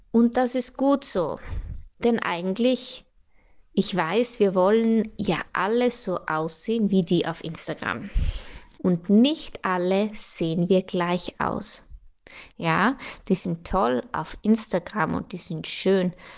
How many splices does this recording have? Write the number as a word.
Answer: two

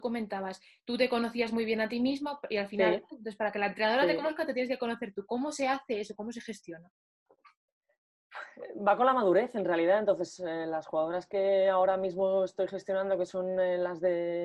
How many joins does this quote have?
one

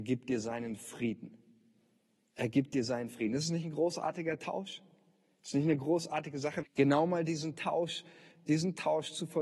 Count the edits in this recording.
one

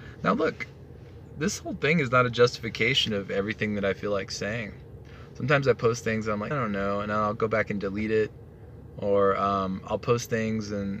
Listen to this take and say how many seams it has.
one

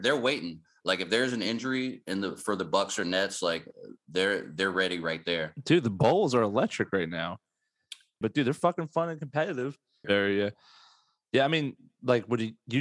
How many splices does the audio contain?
two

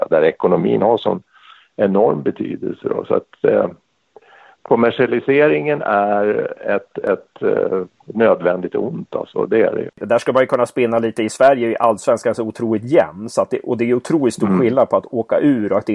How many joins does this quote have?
one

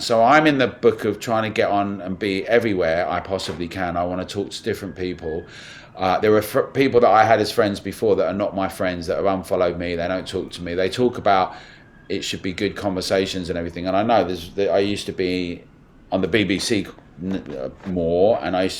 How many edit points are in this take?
zero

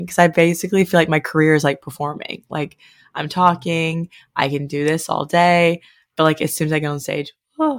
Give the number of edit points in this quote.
zero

